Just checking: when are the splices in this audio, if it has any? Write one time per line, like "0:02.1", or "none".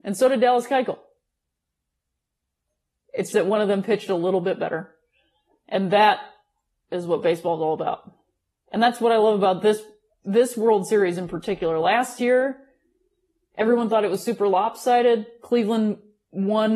0:03.3
0:08.5